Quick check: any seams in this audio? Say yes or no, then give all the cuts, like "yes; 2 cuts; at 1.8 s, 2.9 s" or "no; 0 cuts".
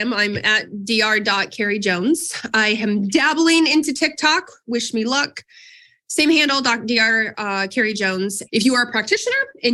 yes; 1 cut; at 8.5 s